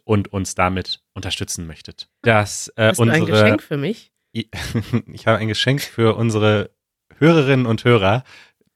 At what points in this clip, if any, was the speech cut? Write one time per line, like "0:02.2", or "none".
0:02.2